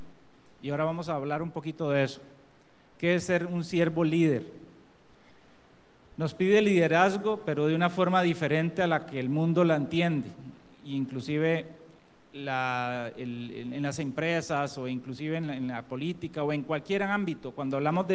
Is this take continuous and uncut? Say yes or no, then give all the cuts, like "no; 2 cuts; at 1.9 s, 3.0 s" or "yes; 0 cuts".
yes; 0 cuts